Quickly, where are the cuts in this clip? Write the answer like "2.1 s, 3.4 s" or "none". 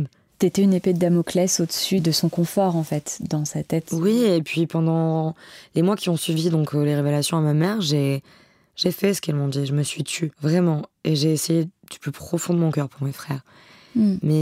none